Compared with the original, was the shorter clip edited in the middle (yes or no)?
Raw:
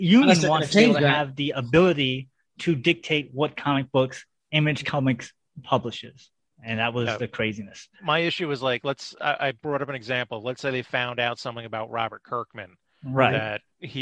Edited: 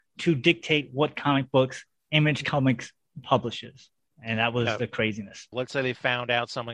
yes